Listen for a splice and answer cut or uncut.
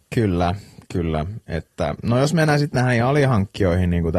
uncut